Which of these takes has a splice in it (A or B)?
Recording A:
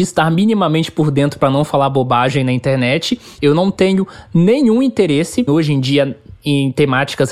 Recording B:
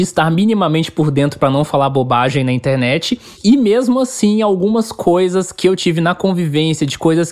A